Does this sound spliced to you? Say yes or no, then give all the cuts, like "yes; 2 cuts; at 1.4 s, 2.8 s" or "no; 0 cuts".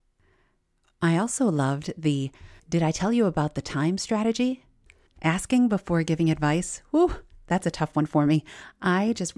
yes; 2 cuts; at 2.6 s, 5.1 s